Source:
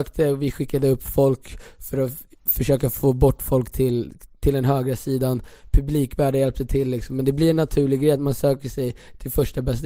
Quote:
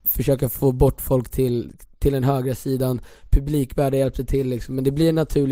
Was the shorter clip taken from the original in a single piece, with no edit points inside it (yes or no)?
yes